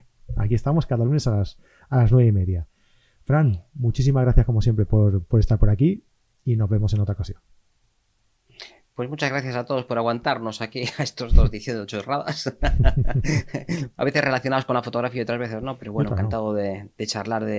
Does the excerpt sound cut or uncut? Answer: uncut